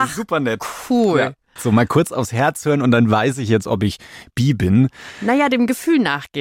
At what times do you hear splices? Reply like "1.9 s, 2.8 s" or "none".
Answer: 1.6 s